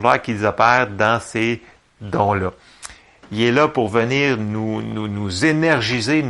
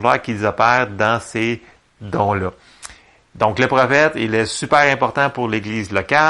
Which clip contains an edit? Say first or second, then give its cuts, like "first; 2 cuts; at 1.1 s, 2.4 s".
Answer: first; 1 cut; at 3.2 s